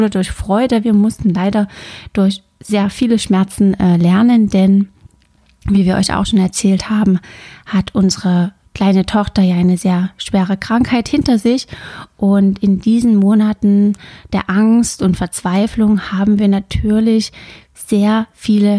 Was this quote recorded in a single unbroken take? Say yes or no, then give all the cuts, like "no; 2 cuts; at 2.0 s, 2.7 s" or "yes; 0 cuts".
yes; 0 cuts